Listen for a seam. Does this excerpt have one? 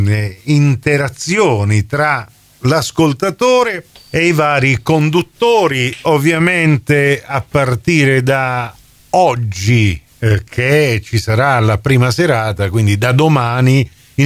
no; 0 cuts

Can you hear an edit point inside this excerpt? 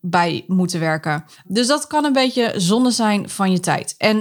no; 0 cuts

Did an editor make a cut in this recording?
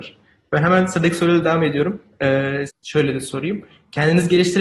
yes; 1 cut; at 2.7 s

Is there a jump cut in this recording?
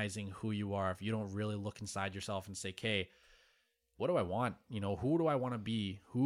no; 0 cuts

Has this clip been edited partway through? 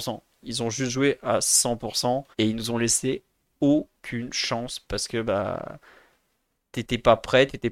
yes; 1 cut; at 2.3 s

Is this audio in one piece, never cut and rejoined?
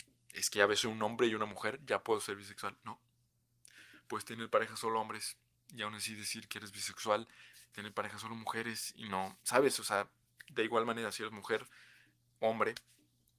no; 1 cut; at 7.7 s

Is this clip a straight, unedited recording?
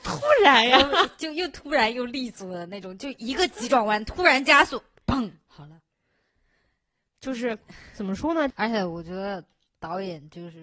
no; 1 cut; at 8.5 s

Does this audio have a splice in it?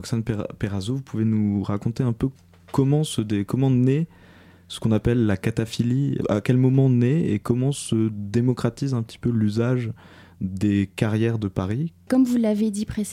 yes; 2 cuts; at 6.2 s, 12.1 s

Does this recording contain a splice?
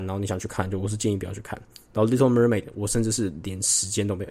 no; 0 cuts

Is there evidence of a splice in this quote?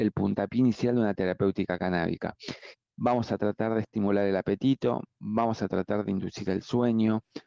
yes; 1 cut; at 2.7 s

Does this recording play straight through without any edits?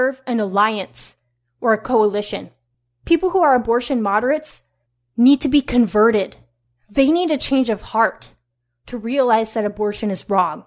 yes; 0 cuts

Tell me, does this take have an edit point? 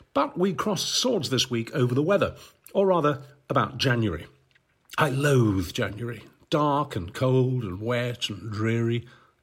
no; 0 cuts

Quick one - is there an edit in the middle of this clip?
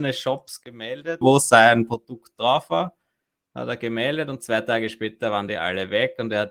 yes; 1 cut; at 1.2 s

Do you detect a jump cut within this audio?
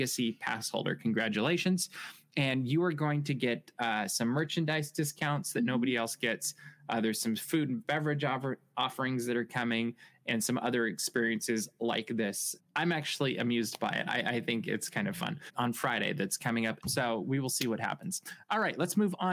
yes; 3 cuts; at 12.6 s, 15.5 s, 16.8 s

